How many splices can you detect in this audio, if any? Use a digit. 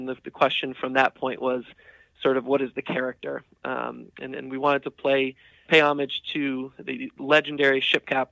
1